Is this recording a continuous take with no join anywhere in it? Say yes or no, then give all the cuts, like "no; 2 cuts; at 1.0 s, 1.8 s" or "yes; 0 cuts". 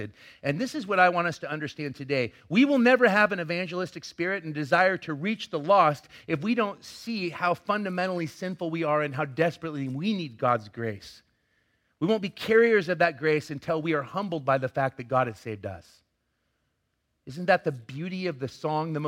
yes; 0 cuts